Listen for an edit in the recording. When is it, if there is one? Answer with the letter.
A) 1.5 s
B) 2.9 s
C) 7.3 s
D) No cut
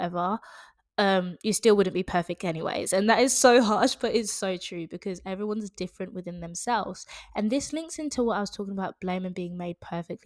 D